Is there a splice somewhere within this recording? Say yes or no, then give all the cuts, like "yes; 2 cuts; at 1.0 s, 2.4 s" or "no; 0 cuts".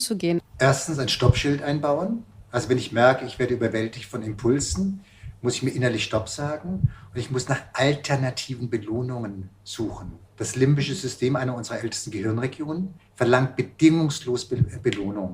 yes; 1 cut; at 10.2 s